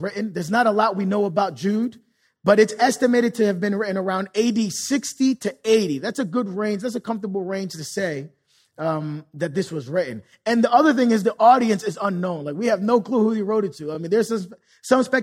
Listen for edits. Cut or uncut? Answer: uncut